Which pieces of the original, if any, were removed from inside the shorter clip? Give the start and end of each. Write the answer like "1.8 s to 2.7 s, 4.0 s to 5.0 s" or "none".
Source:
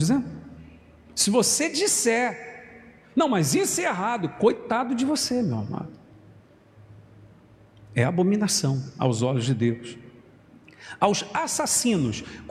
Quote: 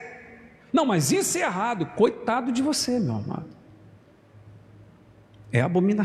none